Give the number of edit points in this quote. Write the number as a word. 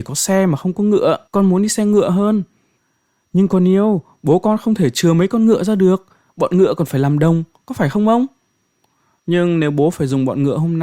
two